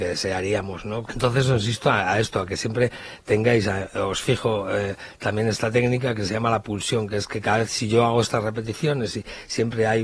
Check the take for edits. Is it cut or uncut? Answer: cut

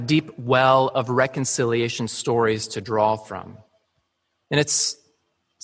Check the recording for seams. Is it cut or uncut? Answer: cut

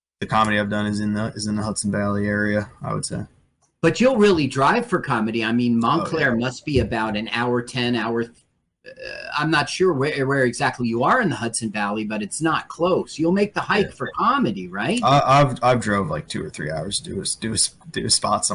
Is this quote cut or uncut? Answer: uncut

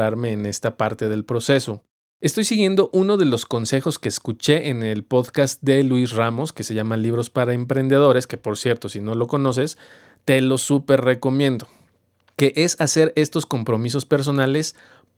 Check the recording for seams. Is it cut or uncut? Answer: uncut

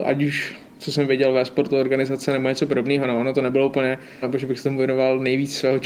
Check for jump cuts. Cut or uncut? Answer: cut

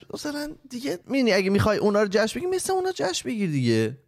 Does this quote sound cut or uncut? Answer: cut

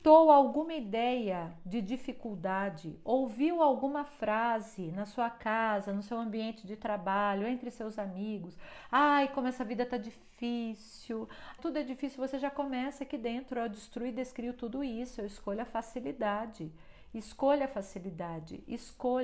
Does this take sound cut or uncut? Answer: cut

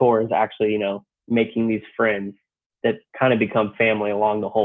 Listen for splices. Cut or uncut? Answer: uncut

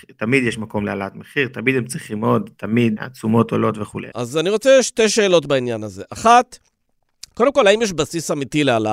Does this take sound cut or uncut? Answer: cut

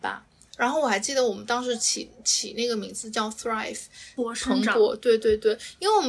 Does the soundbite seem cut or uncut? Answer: cut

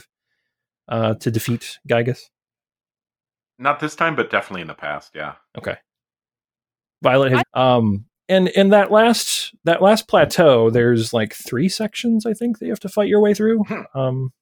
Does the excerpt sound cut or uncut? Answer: cut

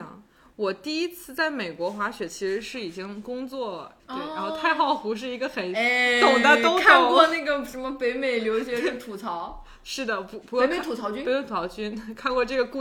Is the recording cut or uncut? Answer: cut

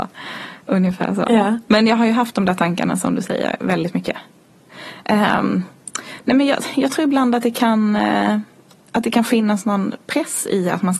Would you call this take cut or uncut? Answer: uncut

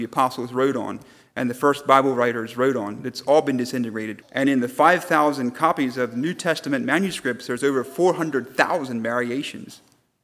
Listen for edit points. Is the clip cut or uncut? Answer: cut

